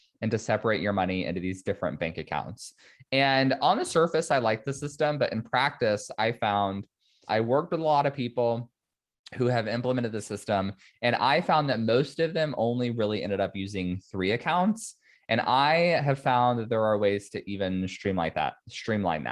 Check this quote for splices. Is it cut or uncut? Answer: cut